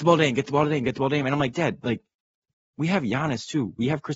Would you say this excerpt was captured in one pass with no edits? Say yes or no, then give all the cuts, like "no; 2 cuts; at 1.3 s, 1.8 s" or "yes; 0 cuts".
yes; 0 cuts